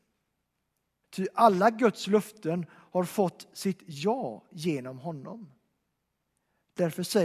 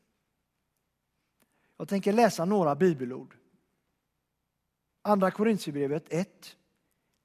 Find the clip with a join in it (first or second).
first